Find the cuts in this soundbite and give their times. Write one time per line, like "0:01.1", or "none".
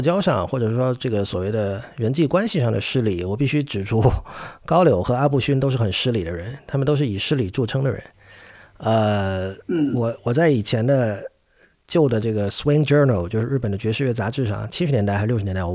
none